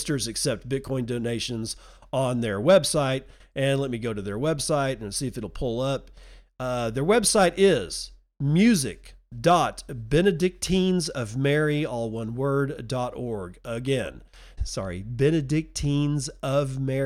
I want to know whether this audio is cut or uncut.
cut